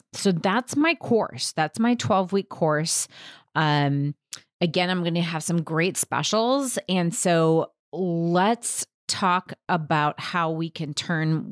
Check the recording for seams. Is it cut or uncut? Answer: uncut